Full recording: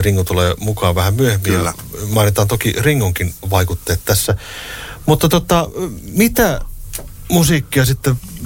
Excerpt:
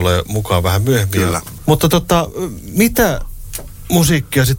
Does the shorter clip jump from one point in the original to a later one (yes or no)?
yes